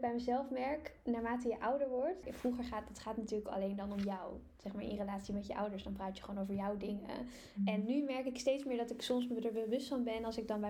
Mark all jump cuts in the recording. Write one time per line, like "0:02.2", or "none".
0:02.2